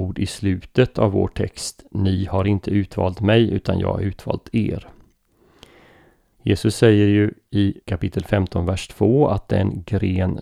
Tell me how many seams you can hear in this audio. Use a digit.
2